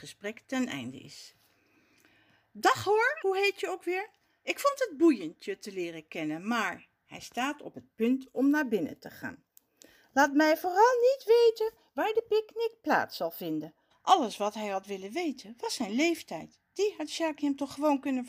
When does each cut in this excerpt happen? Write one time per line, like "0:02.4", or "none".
0:03.2
0:13.9